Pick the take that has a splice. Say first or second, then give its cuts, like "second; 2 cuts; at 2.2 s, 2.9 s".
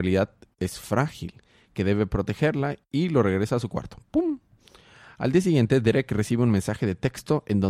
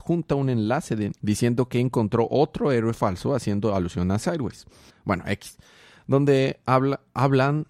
second; 2 cuts; at 1.1 s, 4.9 s